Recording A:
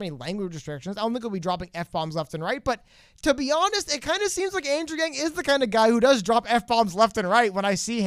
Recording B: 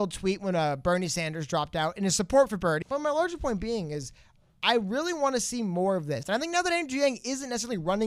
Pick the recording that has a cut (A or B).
B